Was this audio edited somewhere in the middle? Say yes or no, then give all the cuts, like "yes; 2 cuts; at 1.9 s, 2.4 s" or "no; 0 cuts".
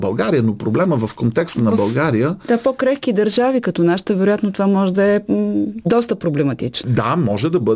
no; 0 cuts